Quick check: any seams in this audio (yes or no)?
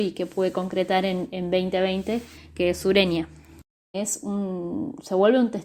yes